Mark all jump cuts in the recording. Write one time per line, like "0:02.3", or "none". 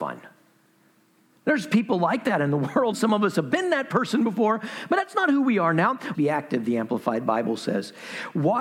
0:02.9
0:06.1